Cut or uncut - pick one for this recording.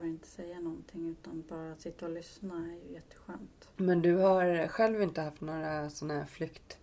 cut